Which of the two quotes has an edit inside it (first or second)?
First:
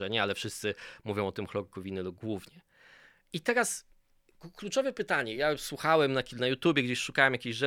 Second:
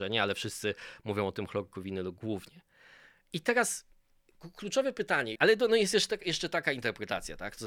second